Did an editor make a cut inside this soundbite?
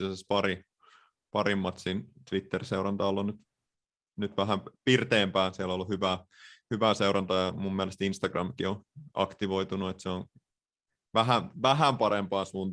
no; 0 cuts

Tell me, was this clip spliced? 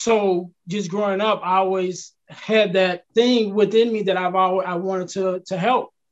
yes; 1 cut; at 3.1 s

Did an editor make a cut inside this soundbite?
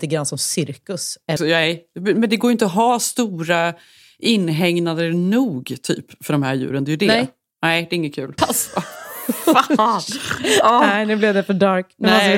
yes; 2 cuts; at 1.4 s, 8.4 s

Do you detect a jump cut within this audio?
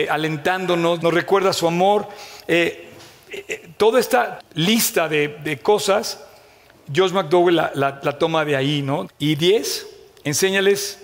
yes; 3 cuts; at 1.0 s, 4.4 s, 9.0 s

